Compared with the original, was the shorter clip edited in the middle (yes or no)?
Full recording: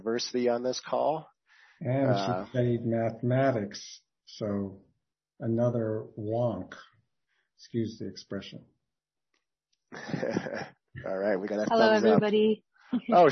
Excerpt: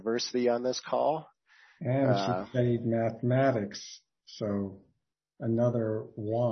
no